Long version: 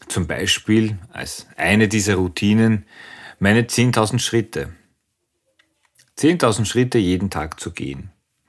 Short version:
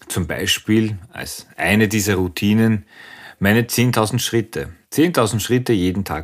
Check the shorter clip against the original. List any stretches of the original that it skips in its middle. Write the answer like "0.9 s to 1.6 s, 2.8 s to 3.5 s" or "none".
4.8 s to 6.1 s